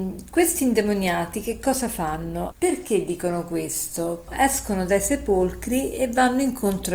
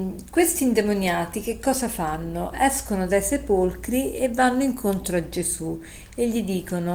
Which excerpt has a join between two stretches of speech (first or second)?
first